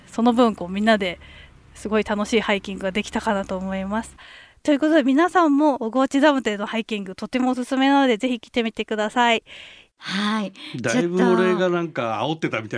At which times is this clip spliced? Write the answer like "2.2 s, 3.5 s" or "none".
9.9 s

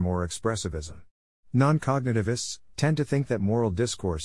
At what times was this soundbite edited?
1.4 s, 2.7 s

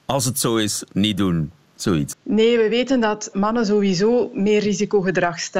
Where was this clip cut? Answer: 2.1 s, 3.3 s

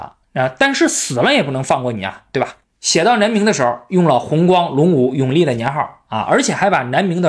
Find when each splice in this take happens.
2.6 s

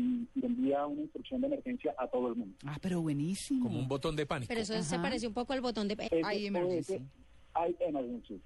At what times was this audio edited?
6.1 s

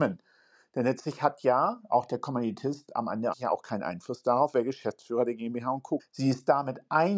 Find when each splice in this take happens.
3.3 s, 6.0 s

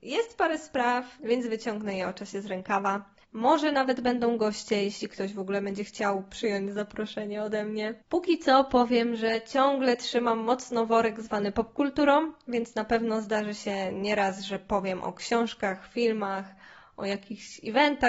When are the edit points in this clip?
1.2 s, 3.2 s, 8.0 s

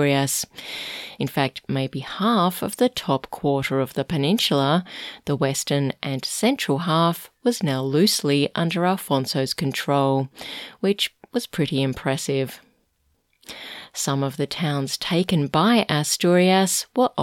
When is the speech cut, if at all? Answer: none

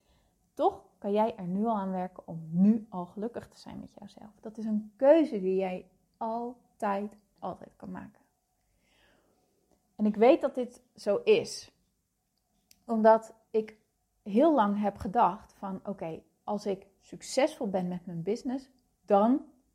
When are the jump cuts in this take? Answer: 7.4 s

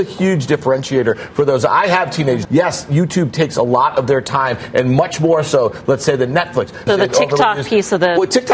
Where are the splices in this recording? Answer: 2.4 s, 6.9 s

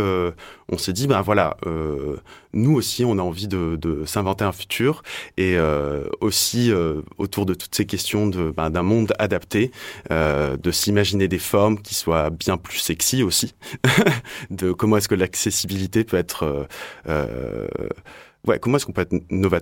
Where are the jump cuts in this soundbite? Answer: none

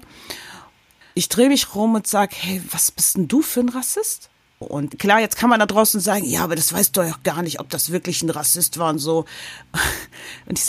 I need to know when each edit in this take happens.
1.0 s, 4.6 s

